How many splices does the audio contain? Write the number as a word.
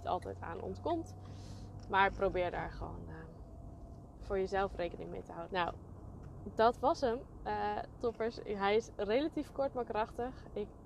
one